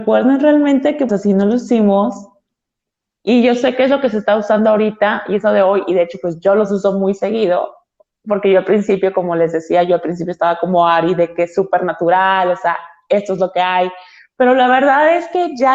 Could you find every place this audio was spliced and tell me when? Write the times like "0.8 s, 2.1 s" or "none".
1.1 s, 3.2 s

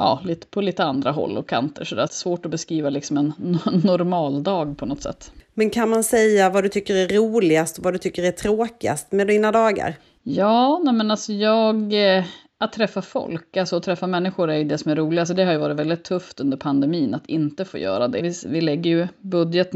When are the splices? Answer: 2.1 s, 18.2 s

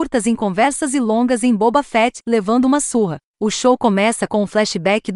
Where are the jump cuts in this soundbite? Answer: 3.2 s

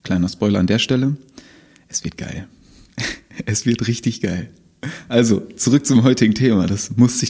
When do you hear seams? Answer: none

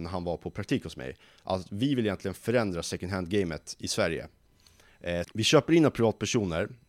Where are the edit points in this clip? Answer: 5.2 s

